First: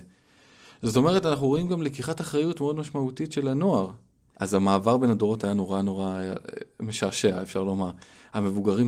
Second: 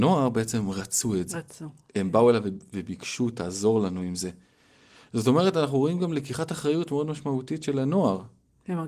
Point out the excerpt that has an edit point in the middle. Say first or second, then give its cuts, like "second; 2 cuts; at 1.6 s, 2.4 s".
first; 1 cut; at 4.3 s